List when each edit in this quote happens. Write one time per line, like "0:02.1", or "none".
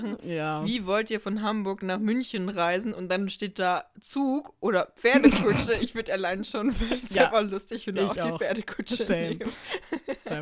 none